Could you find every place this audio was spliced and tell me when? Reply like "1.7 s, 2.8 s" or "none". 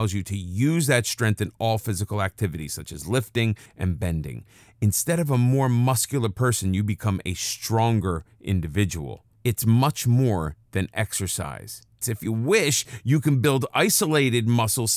3.7 s, 9.4 s, 12.0 s